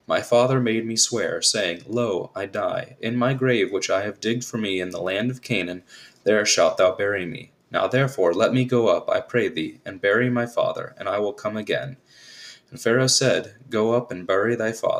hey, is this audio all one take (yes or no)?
yes